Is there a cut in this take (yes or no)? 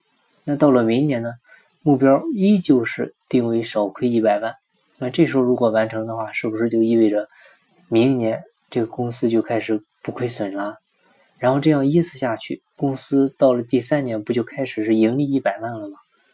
yes